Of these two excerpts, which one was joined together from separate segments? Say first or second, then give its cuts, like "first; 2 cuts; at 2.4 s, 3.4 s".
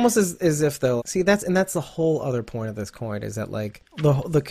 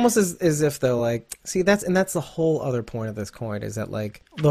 first; 1 cut; at 1.0 s